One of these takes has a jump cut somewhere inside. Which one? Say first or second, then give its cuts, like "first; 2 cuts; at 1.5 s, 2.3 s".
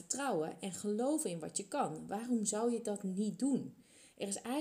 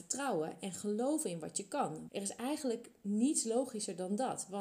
second; 1 cut; at 2.1 s